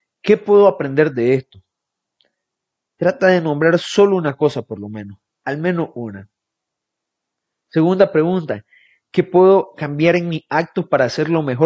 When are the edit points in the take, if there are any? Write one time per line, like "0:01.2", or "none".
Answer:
none

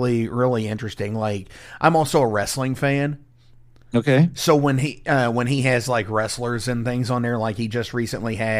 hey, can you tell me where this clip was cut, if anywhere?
none

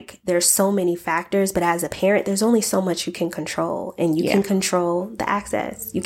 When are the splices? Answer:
none

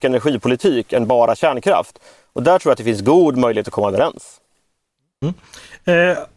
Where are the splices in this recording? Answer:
none

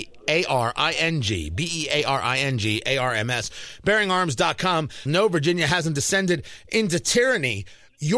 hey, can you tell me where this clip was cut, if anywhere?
0:05.1

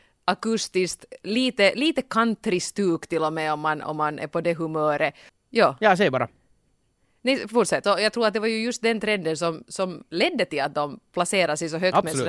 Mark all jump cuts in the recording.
0:05.3
0:07.8

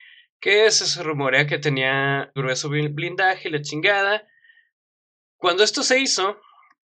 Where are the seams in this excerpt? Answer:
0:02.4

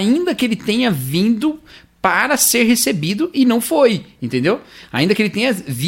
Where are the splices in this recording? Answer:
none

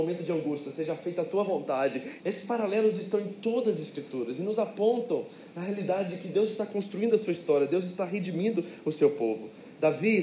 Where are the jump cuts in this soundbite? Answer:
0:02.2

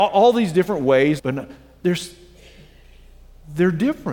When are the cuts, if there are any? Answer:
0:01.2

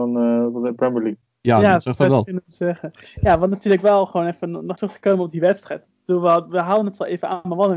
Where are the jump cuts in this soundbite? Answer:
0:04.7

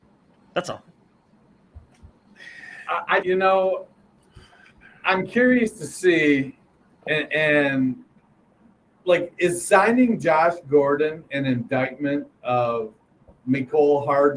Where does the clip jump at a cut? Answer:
0:03.2

